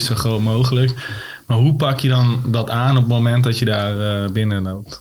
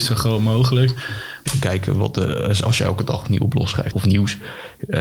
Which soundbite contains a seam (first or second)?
second